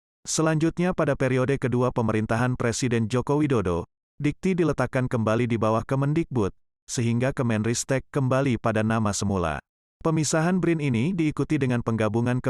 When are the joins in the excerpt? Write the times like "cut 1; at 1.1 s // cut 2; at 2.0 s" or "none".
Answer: cut 1; at 9.8 s